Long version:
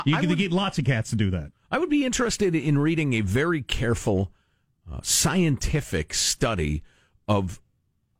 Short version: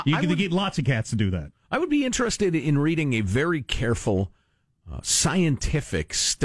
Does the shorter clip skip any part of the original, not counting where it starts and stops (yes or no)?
no